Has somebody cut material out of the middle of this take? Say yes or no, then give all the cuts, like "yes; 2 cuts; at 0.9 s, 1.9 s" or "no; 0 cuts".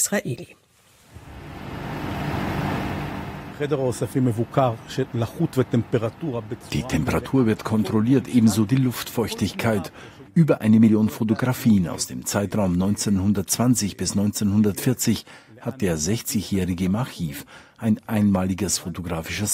yes; 2 cuts; at 3.5 s, 10.3 s